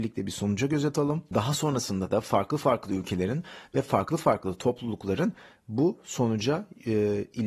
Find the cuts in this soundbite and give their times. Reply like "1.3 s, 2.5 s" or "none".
none